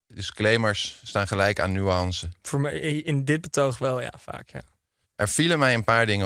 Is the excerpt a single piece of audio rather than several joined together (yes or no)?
no